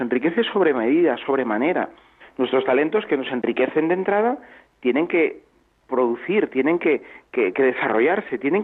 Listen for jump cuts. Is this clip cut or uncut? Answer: cut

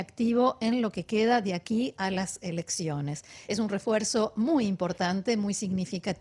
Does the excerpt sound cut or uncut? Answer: uncut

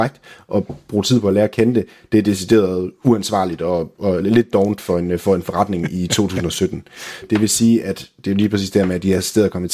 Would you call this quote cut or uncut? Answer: cut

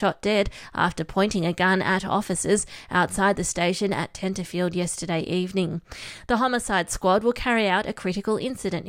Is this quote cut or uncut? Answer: uncut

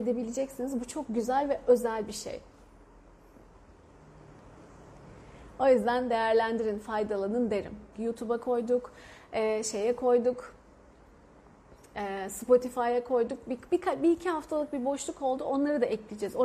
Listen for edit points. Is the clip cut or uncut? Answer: cut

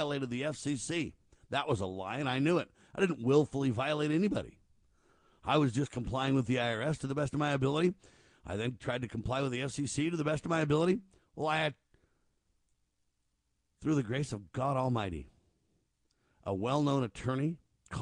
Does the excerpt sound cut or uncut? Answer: uncut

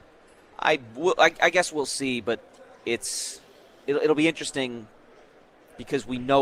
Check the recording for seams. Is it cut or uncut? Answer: uncut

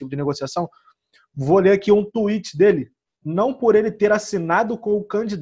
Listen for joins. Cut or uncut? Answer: cut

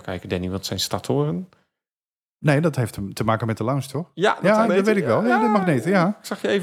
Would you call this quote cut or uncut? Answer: cut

